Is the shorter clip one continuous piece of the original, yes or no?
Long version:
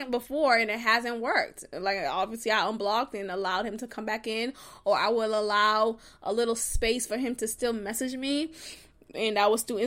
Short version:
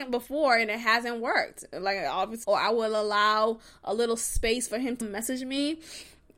no